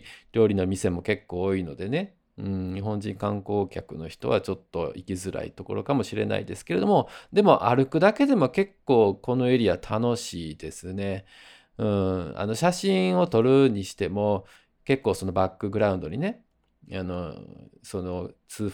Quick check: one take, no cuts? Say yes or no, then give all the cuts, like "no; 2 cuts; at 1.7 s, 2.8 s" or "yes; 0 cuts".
yes; 0 cuts